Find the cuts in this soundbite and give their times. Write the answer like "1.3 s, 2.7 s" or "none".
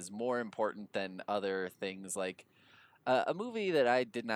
none